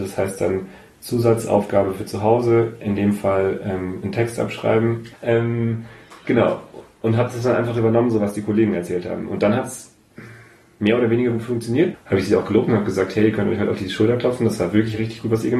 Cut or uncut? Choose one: cut